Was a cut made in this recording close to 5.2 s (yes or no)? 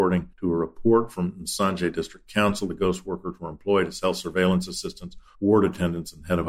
no